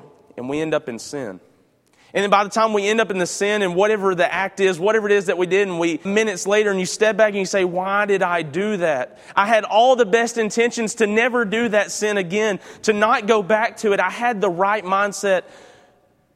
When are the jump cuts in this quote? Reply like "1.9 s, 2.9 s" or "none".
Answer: 6.1 s